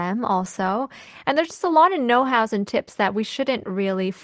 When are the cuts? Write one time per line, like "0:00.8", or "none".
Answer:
none